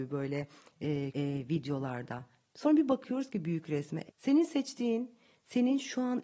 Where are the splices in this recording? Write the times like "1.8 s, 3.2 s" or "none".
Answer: 1.1 s, 4.1 s